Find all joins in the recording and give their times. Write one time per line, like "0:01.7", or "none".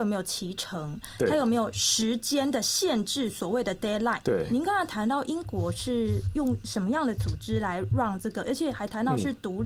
0:04.2